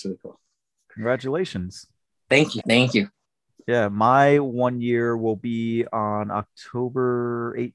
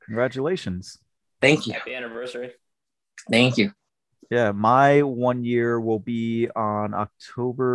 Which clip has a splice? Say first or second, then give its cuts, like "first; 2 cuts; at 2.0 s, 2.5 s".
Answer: first; 1 cut; at 2.6 s